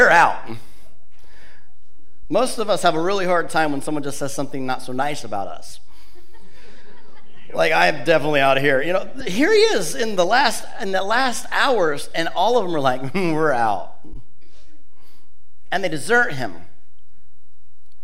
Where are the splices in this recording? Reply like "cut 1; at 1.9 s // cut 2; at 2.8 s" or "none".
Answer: cut 1; at 2.2 s

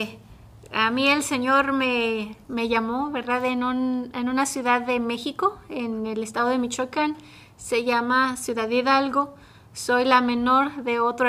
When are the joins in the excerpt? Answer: none

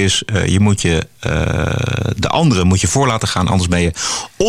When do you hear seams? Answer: none

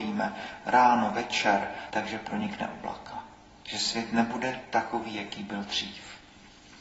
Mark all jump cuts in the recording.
cut 1; at 1.9 s

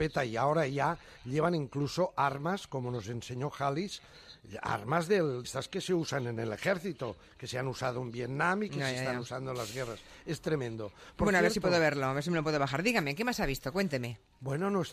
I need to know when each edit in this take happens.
cut 1; at 5.4 s

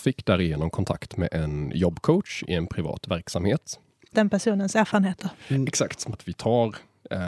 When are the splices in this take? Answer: cut 1; at 4.1 s // cut 2; at 6.1 s

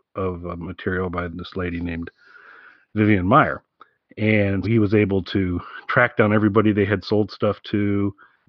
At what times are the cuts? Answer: cut 1; at 1.3 s // cut 2; at 4.6 s

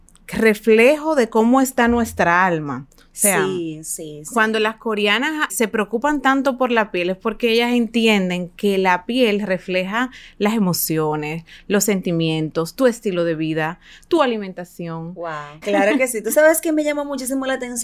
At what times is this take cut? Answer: cut 1; at 5.5 s // cut 2; at 15.6 s

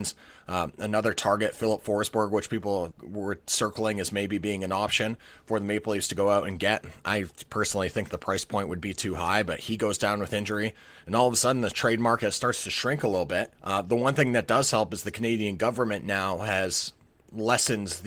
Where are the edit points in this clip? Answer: cut 1; at 2.9 s // cut 2; at 13.5 s

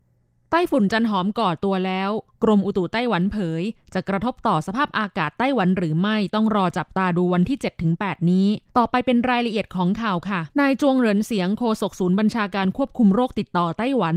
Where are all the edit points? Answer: cut 1; at 8.7 s // cut 2; at 10.5 s

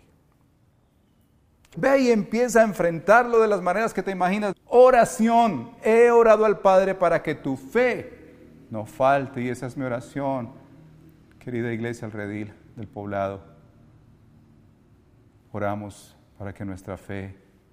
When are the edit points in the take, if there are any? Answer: cut 1; at 1.7 s // cut 2; at 4.5 s

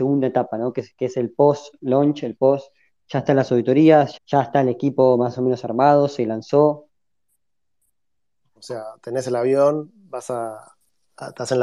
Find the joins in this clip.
cut 1; at 4.2 s // cut 2; at 8.6 s

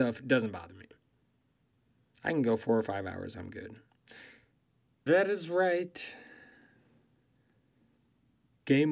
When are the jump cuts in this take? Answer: cut 1; at 5.1 s

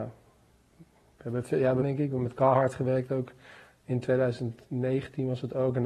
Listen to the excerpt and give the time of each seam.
cut 1; at 1.8 s

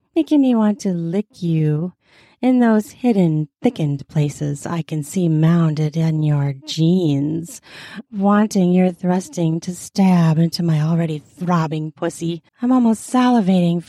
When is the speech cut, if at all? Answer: cut 1; at 8.1 s // cut 2; at 12.5 s

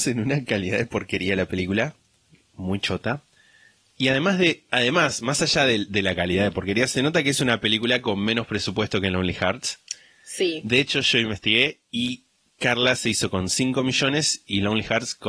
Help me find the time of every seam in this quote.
none

